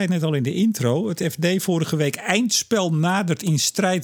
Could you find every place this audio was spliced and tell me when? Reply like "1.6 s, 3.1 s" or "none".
none